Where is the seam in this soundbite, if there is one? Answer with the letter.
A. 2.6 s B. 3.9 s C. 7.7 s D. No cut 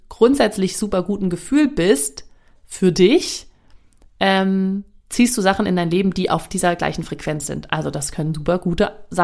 D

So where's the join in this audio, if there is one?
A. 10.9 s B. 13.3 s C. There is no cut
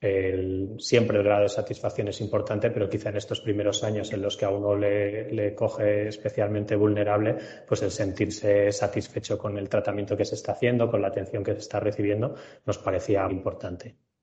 B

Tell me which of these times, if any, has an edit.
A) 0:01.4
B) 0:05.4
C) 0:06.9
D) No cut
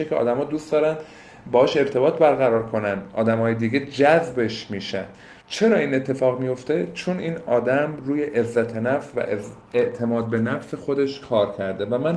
B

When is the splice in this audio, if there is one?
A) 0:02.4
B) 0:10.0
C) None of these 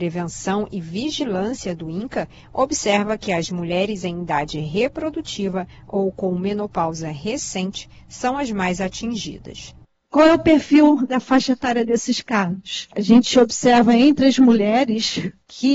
A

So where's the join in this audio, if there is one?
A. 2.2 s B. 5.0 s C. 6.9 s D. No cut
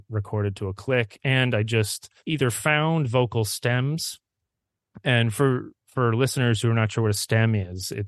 A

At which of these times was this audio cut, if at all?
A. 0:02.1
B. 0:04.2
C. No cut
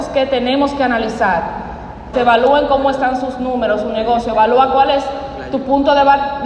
A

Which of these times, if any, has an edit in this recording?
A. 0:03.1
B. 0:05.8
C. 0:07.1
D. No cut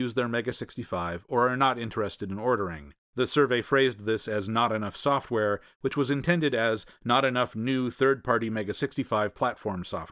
A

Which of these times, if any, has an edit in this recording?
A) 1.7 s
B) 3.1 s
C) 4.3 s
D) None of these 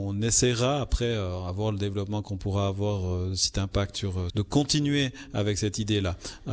C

